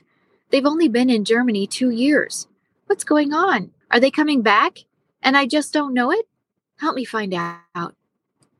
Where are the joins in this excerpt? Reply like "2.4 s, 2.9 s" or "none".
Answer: 3.8 s

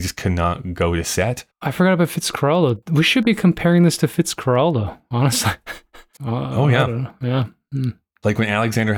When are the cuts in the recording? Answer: 1.5 s, 6.2 s

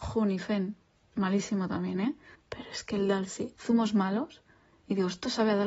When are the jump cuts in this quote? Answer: 2.3 s, 3.6 s

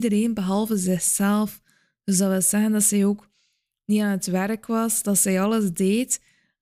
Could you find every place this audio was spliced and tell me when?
none

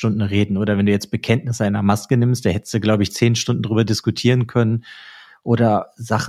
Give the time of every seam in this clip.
none

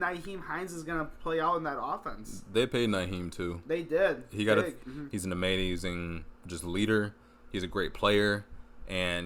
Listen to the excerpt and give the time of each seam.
4.8 s

